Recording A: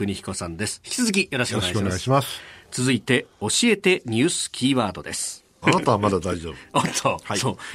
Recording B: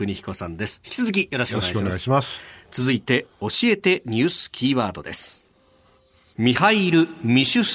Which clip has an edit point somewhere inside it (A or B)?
A